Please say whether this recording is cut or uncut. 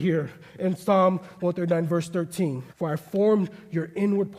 cut